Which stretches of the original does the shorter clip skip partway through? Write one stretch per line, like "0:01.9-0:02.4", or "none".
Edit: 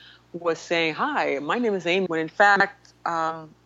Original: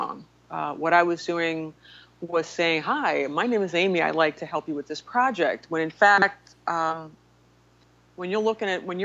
0:03.9-0:05.7